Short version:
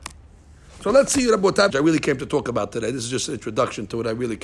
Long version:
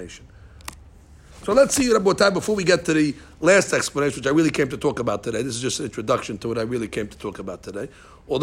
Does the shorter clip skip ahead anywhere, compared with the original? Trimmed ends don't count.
yes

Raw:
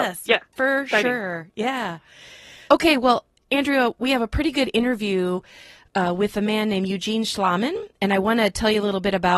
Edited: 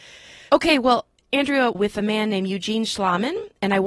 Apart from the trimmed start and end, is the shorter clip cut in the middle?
yes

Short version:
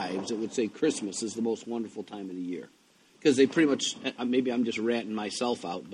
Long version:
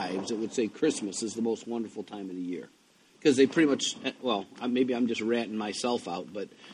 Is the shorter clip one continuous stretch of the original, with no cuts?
no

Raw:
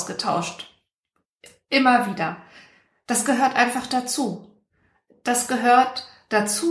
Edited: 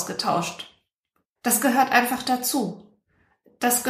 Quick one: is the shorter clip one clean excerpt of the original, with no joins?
no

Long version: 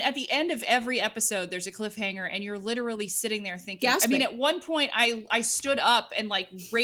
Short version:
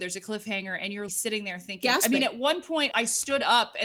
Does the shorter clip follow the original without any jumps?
no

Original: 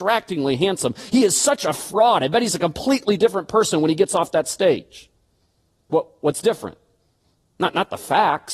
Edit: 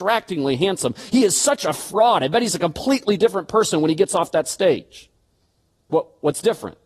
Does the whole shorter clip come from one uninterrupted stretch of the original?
yes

